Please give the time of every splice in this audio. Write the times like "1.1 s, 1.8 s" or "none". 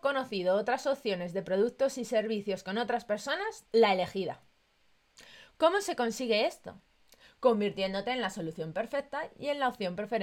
3.6 s